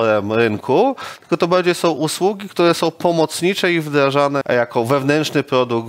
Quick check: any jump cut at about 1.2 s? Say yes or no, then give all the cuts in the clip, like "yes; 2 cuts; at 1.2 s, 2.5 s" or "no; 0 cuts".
no; 1 cut; at 4.4 s